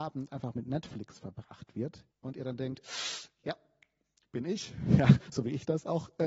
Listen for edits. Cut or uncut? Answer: cut